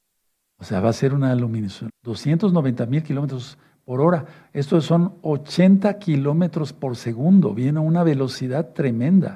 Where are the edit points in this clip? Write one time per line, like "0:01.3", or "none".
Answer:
0:01.9